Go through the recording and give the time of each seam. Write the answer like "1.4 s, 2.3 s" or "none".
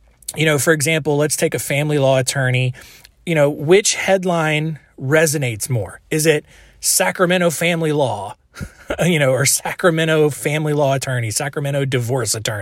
none